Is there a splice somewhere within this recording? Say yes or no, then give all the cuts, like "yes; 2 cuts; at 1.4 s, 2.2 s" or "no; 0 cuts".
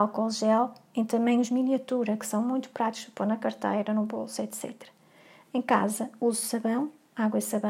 no; 0 cuts